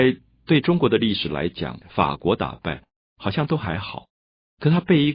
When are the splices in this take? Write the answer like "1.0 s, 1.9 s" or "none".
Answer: 1.8 s